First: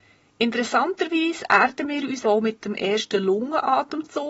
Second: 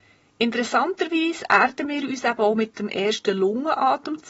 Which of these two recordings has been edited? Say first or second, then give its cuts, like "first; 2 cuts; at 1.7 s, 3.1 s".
first; 1 cut; at 2.2 s